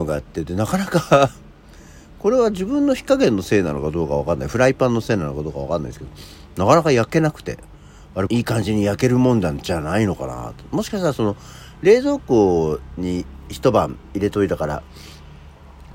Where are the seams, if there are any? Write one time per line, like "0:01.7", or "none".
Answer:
0:08.3